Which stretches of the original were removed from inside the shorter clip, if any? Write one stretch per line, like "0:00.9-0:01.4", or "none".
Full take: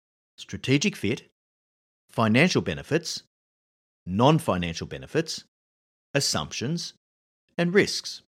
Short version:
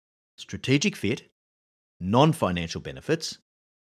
0:01.8-0:03.9